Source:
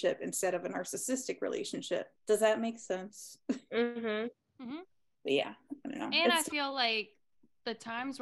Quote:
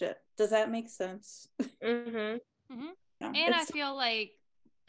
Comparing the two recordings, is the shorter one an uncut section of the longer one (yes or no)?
no